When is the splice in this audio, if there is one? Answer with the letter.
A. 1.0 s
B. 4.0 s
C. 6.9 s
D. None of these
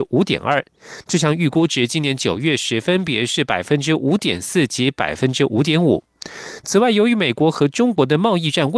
D